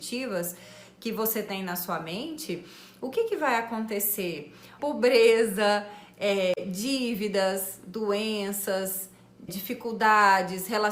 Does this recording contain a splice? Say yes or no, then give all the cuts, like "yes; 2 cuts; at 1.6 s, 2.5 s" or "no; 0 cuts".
yes; 2 cuts; at 4.8 s, 9.5 s